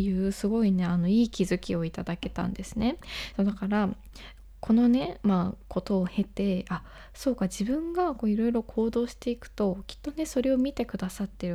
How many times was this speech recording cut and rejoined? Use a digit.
0